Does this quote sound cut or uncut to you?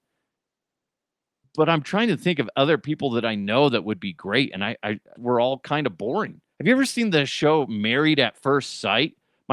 cut